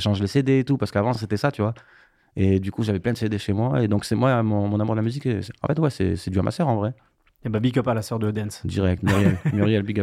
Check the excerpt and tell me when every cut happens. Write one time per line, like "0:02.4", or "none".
none